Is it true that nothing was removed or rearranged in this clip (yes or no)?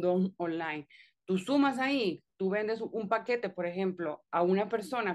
yes